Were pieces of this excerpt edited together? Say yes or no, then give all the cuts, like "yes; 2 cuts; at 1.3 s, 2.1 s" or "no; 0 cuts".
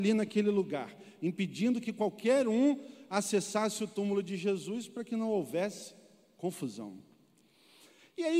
no; 0 cuts